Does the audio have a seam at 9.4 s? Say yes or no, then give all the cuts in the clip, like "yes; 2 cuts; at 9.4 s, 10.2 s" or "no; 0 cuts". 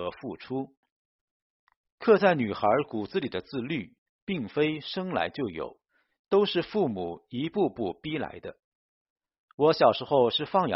yes; 1 cut; at 9.4 s